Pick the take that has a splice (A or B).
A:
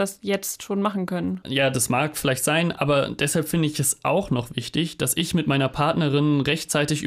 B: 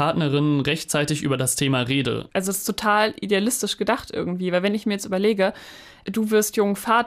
B